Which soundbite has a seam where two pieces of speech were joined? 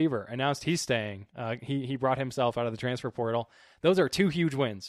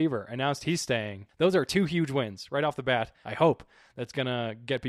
second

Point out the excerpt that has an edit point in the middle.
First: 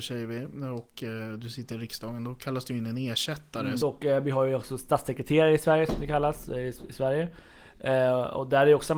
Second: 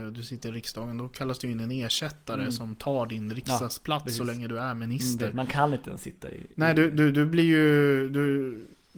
first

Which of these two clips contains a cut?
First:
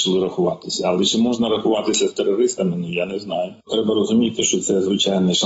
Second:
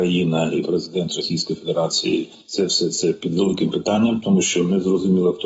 first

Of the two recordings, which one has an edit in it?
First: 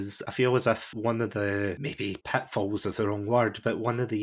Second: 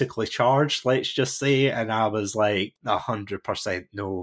second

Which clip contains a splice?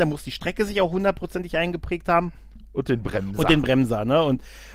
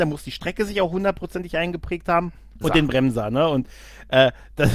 second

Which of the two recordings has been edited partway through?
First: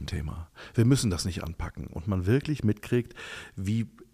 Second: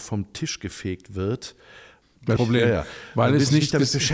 second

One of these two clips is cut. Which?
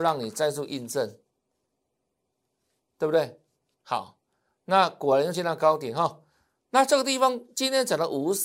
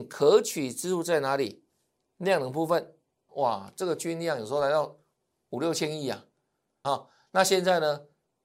second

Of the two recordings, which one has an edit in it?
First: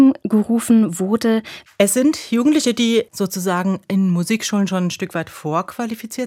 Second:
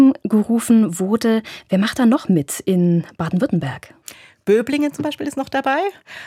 first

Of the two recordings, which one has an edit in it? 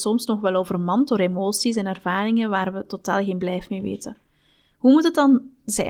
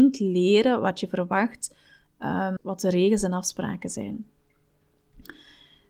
second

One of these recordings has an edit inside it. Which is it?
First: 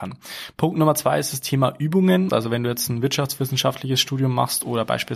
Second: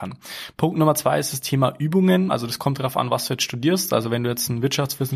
first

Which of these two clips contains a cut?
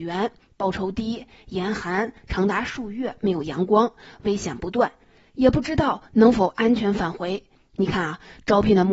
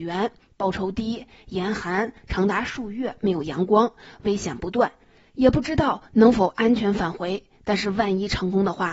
first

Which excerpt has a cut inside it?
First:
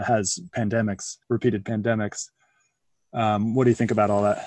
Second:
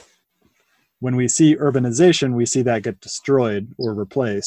first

